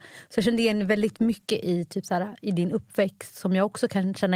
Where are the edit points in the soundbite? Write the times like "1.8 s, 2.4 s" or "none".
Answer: none